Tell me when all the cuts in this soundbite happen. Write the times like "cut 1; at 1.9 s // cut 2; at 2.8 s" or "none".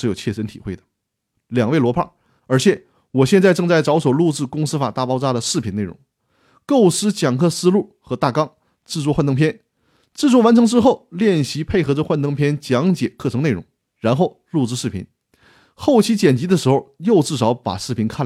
cut 1; at 2.4 s